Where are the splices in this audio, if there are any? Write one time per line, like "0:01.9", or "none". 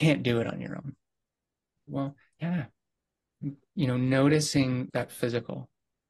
0:01.9
0:04.9